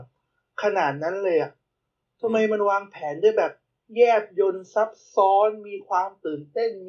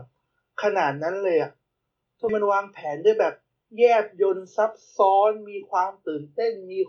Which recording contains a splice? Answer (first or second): second